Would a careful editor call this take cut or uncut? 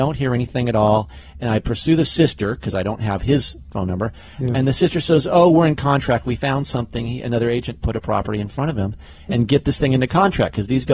cut